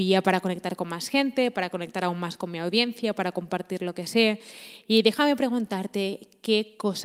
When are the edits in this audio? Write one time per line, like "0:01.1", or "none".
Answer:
none